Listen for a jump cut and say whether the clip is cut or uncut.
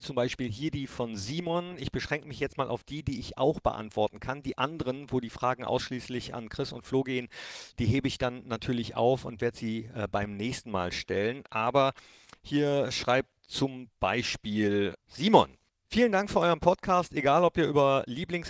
uncut